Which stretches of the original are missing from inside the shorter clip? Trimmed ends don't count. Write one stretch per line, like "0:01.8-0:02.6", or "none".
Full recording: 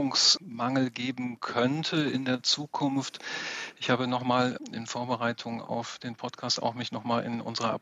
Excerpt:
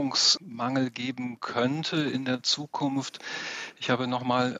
none